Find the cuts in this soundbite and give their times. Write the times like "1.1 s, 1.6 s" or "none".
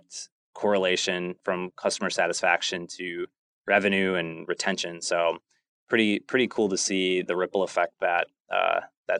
1.4 s